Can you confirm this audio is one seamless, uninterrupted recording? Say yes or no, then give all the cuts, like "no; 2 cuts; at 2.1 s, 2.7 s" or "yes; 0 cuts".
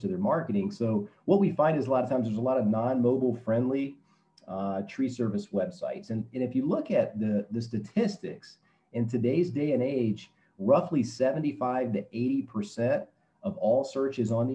yes; 0 cuts